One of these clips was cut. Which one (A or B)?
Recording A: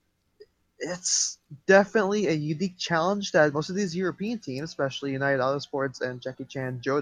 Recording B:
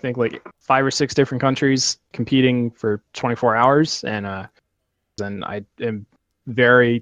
B